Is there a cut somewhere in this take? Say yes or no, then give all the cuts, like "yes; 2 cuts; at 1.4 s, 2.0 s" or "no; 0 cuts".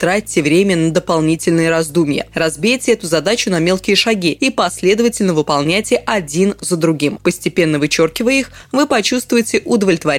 no; 0 cuts